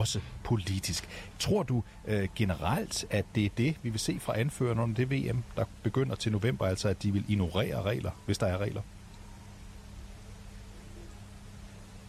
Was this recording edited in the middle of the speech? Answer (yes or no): yes